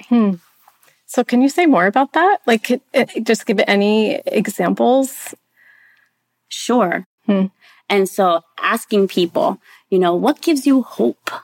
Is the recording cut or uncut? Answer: cut